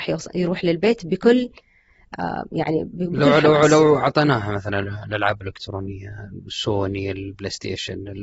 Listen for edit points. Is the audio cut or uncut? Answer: uncut